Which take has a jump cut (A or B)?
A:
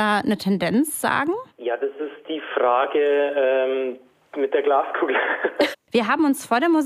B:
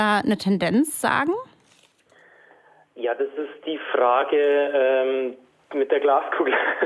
A